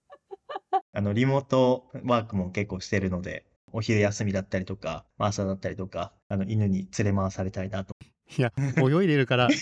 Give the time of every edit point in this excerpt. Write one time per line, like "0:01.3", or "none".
0:06.2